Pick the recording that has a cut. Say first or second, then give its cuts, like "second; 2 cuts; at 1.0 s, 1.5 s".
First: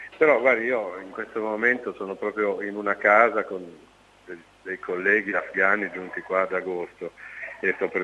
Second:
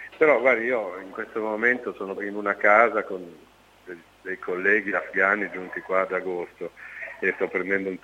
second; 1 cut; at 2.2 s